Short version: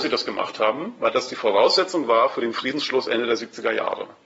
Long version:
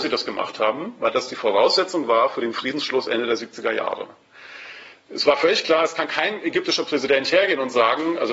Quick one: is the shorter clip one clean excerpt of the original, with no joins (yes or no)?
yes